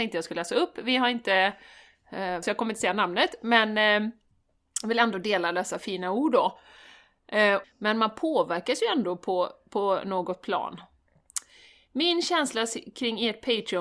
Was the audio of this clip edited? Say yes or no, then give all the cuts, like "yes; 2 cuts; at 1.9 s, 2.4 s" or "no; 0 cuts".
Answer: yes; 2 cuts; at 2.4 s, 7.6 s